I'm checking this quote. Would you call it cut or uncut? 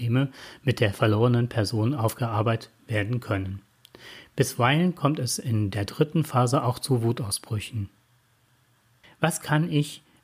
cut